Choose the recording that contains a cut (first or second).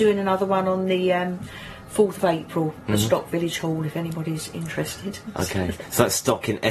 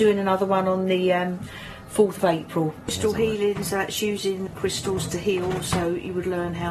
second